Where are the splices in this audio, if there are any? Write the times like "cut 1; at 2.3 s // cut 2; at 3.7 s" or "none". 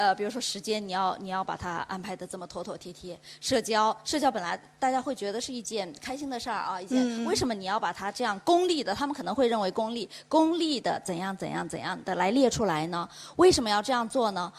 none